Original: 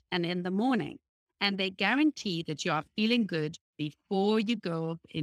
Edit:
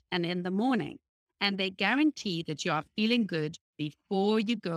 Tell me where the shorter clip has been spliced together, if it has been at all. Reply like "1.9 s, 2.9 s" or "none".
none